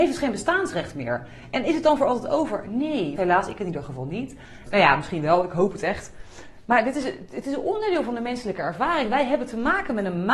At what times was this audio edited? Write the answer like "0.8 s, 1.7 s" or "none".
3.2 s, 4.7 s